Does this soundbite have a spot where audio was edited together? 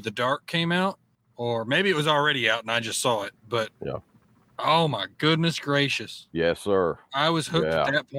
no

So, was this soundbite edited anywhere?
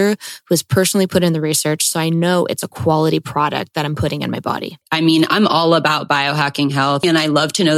no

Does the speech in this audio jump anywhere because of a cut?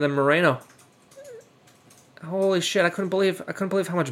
no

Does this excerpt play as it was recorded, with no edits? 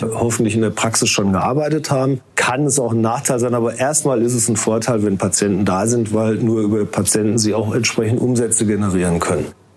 no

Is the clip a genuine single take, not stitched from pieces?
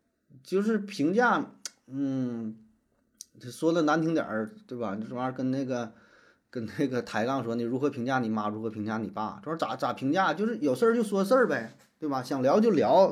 yes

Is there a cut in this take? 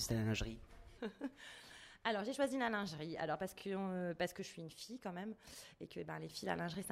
no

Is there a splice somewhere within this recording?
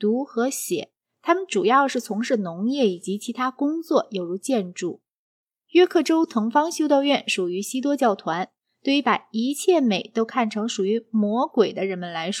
no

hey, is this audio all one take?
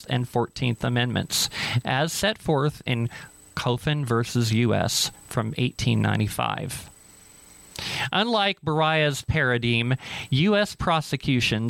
yes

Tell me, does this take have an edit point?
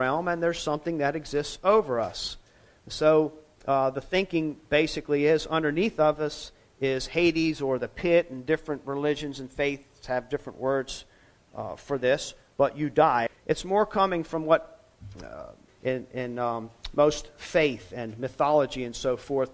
yes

